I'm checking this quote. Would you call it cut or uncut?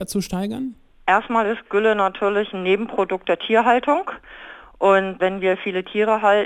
uncut